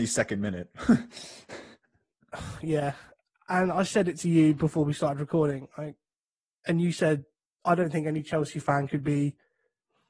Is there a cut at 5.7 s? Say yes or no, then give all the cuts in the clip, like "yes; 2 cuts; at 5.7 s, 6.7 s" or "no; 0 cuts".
no; 0 cuts